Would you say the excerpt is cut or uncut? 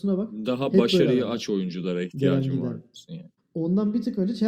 cut